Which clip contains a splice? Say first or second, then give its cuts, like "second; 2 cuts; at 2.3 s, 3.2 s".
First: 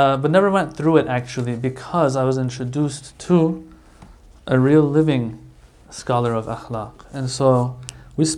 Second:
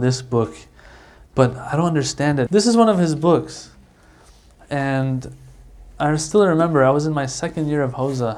second; 1 cut; at 2.5 s